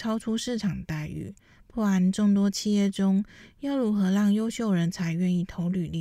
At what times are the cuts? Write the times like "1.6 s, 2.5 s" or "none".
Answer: none